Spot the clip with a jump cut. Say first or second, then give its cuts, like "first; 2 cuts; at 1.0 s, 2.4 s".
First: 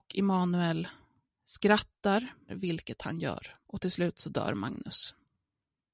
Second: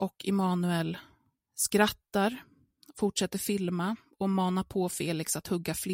first; 2 cuts; at 2.5 s, 3.6 s